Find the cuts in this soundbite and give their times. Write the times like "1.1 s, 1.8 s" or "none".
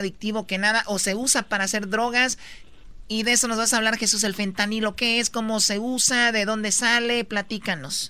none

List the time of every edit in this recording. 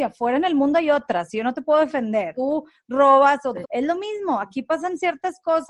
2.3 s, 3.6 s

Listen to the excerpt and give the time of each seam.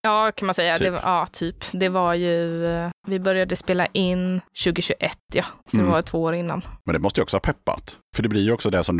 5.6 s

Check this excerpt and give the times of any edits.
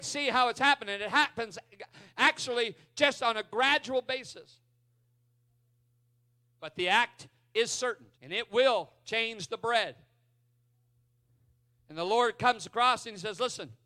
8.1 s

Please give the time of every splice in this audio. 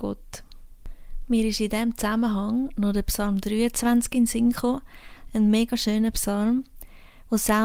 none

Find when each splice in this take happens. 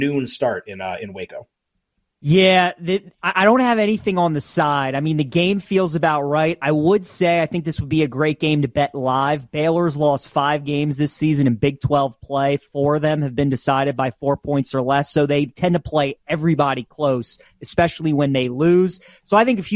none

